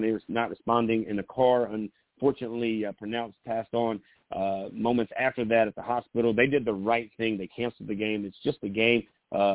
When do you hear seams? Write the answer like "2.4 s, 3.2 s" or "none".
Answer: none